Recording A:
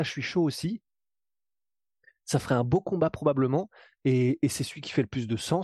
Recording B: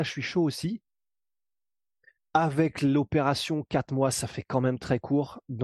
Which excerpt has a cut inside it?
B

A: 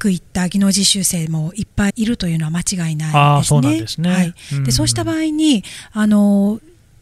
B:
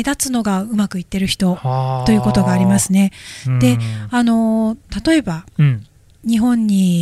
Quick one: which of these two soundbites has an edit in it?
A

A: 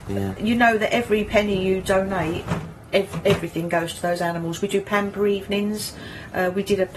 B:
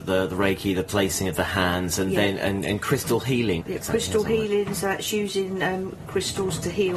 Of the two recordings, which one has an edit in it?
B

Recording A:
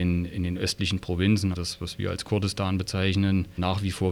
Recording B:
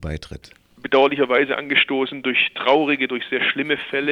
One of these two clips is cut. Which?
A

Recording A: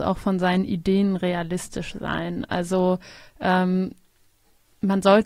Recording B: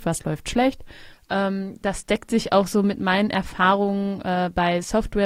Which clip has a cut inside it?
B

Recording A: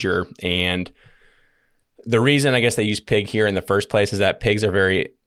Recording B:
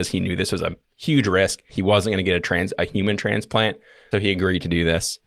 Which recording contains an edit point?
B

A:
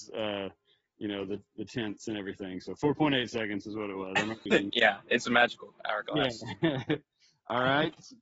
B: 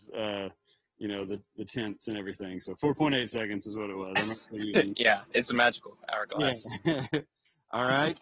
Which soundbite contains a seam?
A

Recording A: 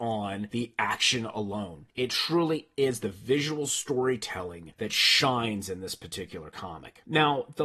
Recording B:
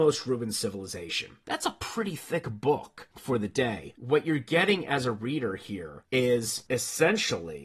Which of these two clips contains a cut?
B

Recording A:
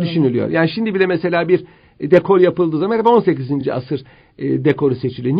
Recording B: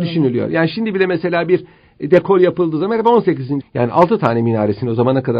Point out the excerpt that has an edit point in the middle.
B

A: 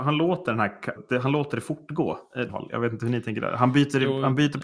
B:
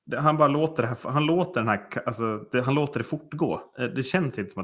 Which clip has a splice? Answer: A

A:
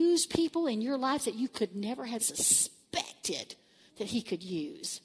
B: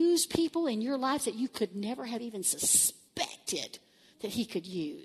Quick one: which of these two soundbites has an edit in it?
A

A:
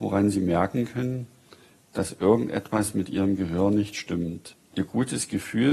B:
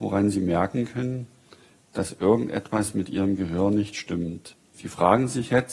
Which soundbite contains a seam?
B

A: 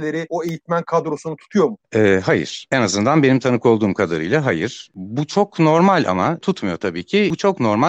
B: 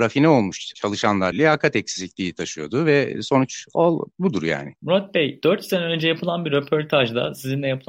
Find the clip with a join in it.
B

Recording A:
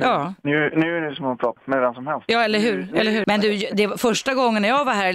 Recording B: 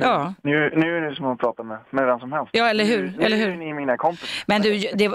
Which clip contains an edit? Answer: A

